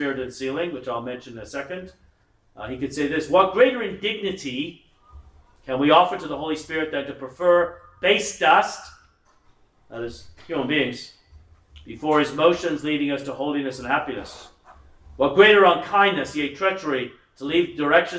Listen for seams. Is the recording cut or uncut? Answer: uncut